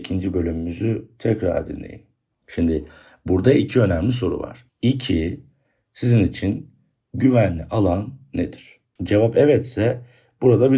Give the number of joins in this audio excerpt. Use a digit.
3